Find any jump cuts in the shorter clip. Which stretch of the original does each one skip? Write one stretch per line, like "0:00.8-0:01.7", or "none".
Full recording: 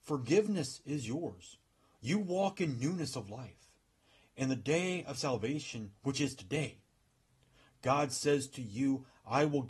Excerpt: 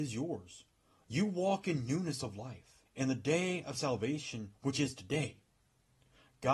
0:03.8-0:04.3